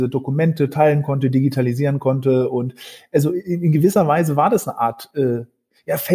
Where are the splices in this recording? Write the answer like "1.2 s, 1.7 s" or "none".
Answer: none